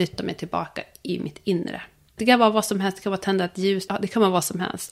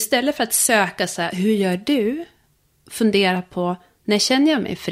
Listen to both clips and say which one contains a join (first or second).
first